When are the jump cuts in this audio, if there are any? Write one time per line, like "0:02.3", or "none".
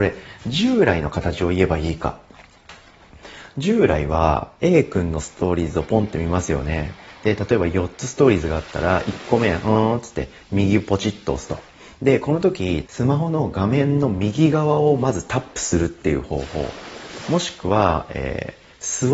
0:12.8